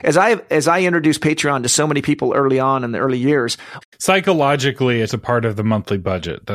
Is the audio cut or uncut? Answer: cut